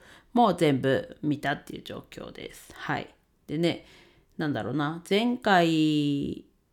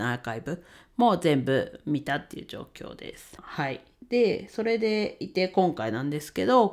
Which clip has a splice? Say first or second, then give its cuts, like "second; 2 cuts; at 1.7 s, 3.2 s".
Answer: second; 1 cut; at 3.4 s